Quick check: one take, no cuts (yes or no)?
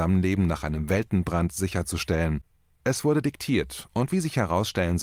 yes